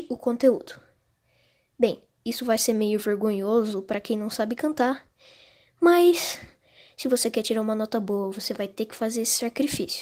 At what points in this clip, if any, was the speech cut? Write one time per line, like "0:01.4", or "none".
none